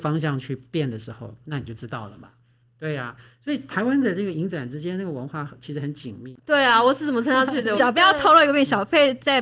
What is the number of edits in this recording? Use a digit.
2